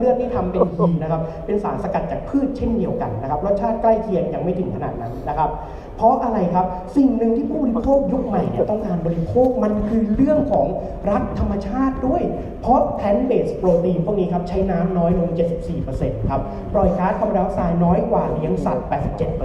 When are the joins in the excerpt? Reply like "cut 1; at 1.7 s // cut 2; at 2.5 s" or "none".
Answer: cut 1; at 1.0 s

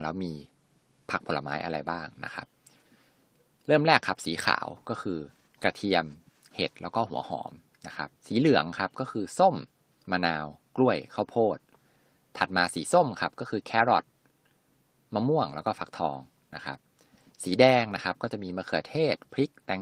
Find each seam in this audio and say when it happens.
cut 1; at 8.2 s

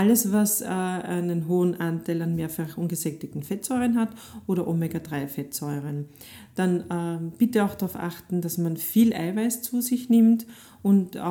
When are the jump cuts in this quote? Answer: none

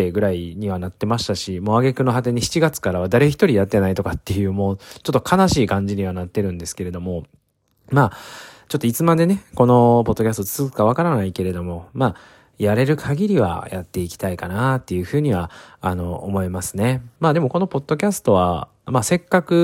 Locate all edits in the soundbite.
cut 1; at 17.2 s

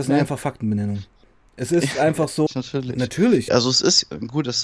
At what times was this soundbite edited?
cut 1; at 2.5 s // cut 2; at 3.5 s

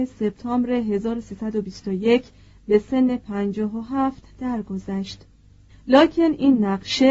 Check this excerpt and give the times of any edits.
cut 1; at 5.7 s

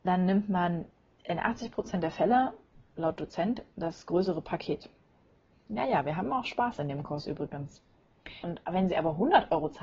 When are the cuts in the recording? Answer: cut 1; at 5.5 s // cut 2; at 8.4 s

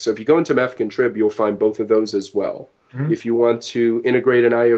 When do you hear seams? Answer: cut 1; at 2.9 s

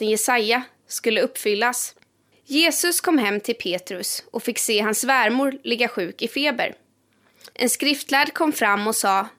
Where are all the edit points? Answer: cut 1; at 2.3 s // cut 2; at 7.5 s

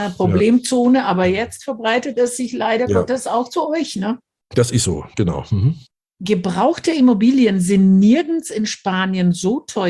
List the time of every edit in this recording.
none

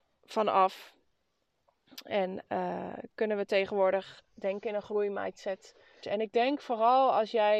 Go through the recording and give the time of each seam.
cut 1; at 6.0 s

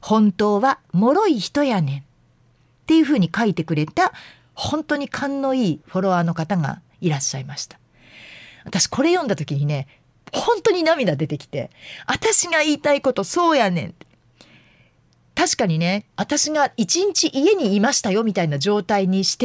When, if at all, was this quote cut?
cut 1; at 16.1 s

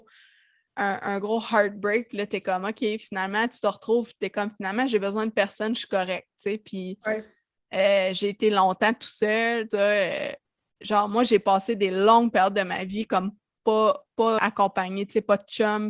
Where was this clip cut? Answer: cut 1; at 9.7 s // cut 2; at 14.4 s

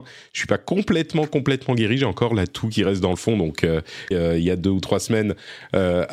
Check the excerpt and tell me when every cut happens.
cut 1; at 4.1 s

